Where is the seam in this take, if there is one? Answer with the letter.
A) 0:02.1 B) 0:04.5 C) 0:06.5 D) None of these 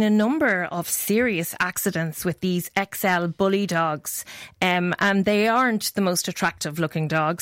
D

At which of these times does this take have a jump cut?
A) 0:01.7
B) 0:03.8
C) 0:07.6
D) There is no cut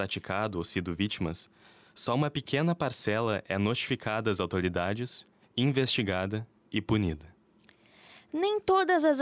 D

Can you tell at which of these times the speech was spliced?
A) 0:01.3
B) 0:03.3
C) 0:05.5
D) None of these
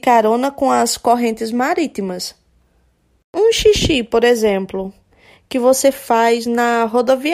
D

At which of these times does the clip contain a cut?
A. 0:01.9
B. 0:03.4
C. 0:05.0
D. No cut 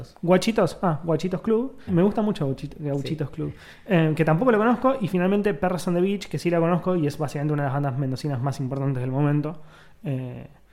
A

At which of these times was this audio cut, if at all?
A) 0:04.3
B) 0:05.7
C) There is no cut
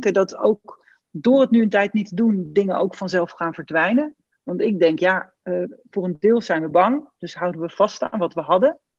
A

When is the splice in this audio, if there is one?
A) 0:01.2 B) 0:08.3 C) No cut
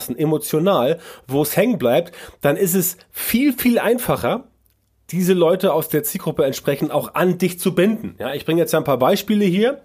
C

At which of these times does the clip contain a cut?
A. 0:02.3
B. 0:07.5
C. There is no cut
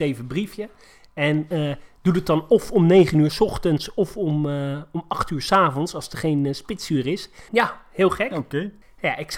B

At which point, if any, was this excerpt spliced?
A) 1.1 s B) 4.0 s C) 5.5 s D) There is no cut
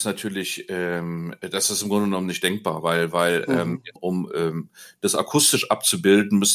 B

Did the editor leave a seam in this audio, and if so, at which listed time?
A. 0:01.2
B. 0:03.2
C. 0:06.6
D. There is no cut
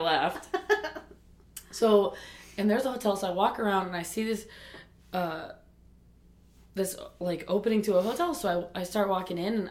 D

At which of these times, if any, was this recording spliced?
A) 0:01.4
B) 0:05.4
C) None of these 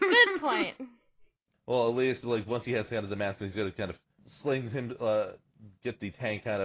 C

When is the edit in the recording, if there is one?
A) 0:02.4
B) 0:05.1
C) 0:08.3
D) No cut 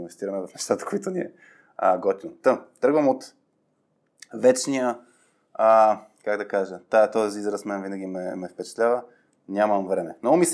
D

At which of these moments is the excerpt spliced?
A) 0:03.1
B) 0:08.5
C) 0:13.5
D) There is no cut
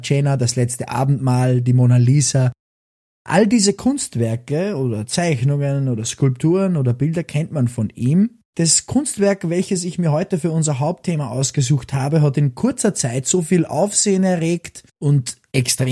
B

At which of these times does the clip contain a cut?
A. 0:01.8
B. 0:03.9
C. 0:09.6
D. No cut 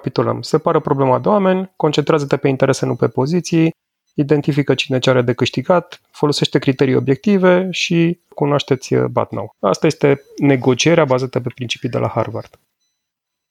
C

